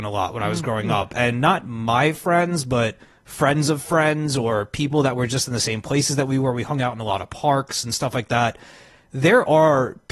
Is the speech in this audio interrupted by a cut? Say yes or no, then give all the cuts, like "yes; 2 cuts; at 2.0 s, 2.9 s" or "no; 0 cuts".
no; 0 cuts